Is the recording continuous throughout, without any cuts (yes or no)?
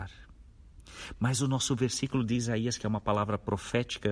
yes